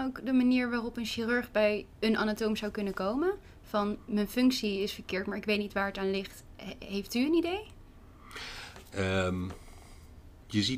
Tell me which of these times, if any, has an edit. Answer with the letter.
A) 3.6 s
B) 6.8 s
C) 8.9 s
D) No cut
C